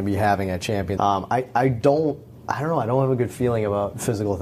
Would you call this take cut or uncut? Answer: cut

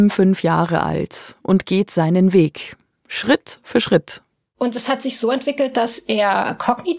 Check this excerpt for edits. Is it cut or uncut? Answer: uncut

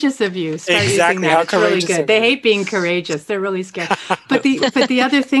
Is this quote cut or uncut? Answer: uncut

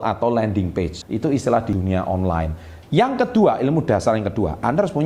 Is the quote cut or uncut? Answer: cut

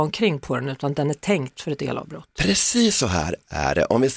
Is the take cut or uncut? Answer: cut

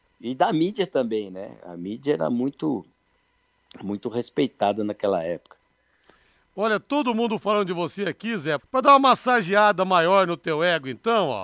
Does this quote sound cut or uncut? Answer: cut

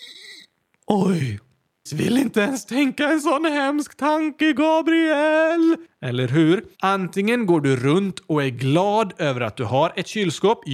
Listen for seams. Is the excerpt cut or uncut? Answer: cut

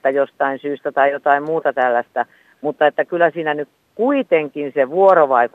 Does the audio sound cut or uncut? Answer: uncut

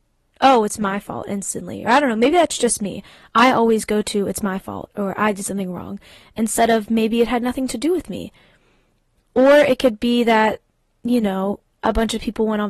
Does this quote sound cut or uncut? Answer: uncut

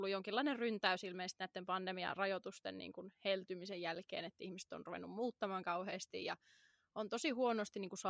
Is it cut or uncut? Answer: uncut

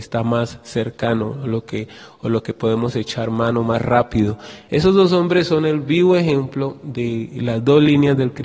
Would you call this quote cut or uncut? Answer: cut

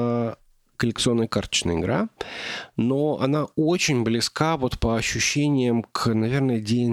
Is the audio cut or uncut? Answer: uncut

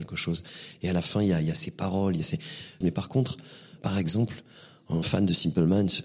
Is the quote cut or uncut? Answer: cut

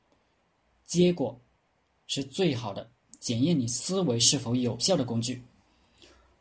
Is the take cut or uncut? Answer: uncut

